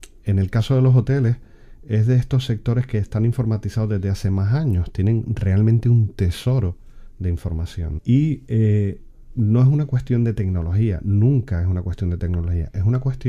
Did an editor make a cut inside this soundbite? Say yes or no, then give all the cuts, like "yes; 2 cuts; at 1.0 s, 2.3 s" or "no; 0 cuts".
yes; 1 cut; at 8.0 s